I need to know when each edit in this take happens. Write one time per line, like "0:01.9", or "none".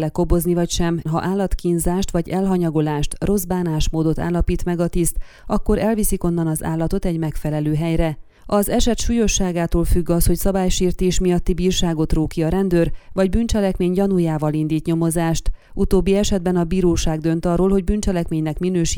0:01.1